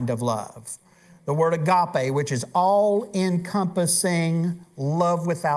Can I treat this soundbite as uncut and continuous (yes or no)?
yes